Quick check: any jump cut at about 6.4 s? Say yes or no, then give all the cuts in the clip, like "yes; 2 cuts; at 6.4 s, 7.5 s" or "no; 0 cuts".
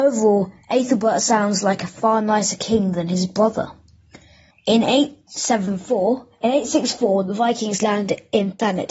no; 1 cut; at 4.5 s